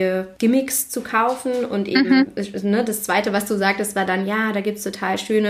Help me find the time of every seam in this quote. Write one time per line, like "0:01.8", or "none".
none